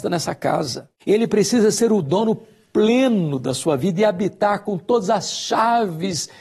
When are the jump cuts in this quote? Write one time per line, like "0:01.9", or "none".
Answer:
0:01.0